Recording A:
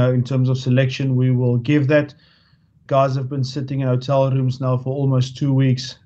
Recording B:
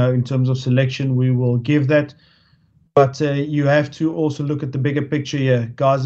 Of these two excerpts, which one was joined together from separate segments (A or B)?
A